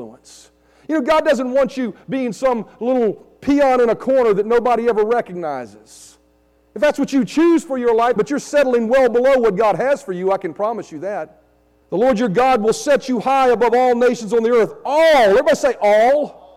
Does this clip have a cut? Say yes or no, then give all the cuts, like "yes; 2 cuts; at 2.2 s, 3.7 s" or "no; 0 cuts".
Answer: yes; 2 cuts; at 8.2 s, 11.8 s